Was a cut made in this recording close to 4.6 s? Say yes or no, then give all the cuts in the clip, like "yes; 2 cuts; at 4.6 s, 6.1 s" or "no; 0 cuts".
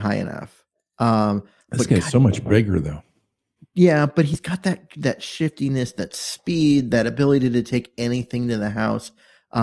no; 0 cuts